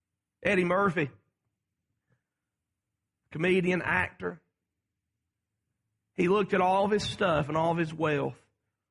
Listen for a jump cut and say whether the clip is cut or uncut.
uncut